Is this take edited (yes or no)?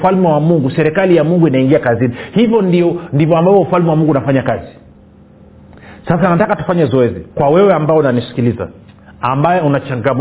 yes